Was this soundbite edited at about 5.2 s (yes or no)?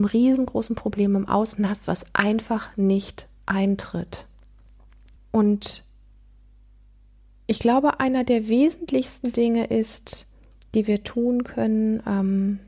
yes